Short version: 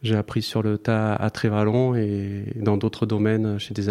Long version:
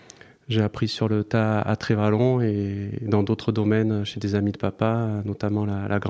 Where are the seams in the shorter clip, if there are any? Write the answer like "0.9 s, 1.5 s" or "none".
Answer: none